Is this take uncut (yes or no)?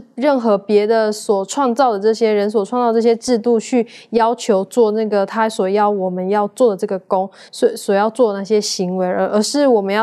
yes